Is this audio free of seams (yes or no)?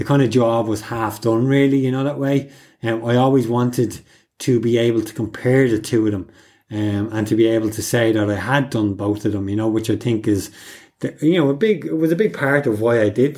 yes